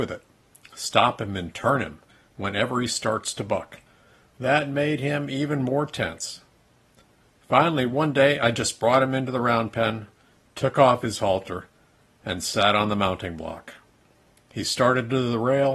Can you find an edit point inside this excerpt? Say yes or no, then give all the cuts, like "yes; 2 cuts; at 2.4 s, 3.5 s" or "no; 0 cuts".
no; 0 cuts